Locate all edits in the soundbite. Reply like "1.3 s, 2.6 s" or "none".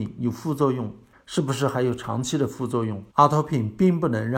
1.1 s, 3.1 s